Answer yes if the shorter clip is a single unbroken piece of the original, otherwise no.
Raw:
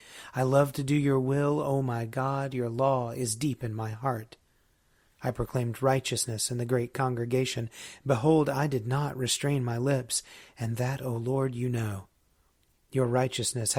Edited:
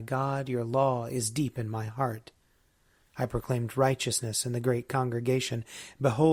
yes